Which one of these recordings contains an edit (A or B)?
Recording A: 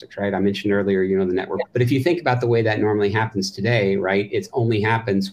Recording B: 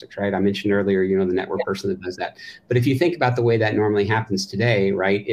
A